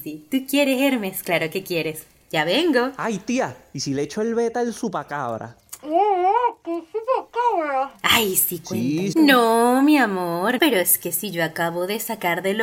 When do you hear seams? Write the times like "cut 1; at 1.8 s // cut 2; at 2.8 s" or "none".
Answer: cut 1; at 9.1 s // cut 2; at 10.6 s